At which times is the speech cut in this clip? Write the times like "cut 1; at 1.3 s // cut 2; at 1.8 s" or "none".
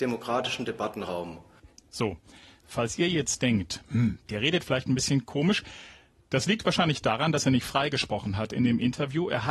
none